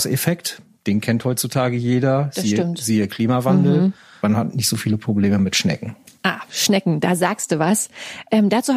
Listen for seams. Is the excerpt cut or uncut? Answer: cut